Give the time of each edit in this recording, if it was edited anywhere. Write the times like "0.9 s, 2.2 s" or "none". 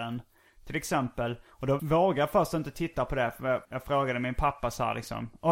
1.8 s, 3.7 s